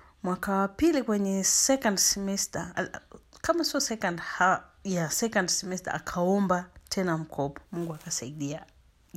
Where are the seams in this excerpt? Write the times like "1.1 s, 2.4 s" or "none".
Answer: 2.7 s, 7.7 s